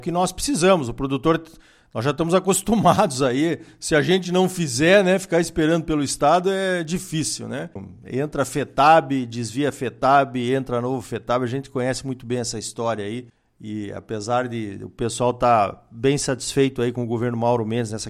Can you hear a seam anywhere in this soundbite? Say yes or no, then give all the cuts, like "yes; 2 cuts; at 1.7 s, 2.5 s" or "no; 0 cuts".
no; 0 cuts